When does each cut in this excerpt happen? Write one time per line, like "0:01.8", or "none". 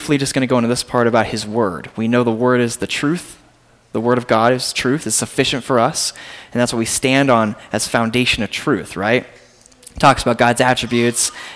none